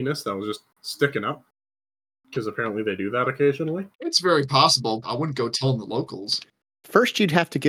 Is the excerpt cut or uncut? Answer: cut